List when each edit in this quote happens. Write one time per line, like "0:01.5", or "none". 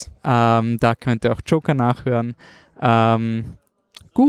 none